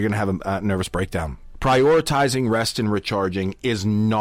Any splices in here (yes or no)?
no